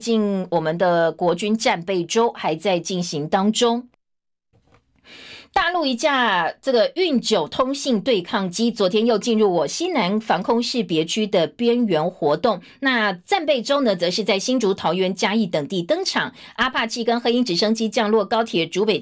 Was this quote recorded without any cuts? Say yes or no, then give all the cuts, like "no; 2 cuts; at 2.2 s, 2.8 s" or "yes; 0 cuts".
yes; 0 cuts